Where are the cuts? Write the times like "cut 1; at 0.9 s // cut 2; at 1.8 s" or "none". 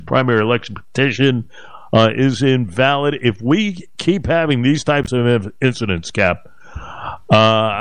none